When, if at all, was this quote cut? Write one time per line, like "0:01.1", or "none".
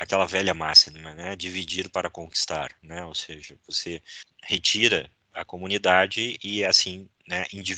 none